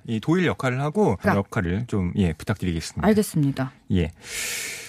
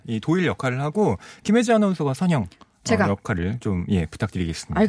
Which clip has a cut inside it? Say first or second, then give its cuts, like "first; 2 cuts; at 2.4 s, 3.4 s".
first; 1 cut; at 1.2 s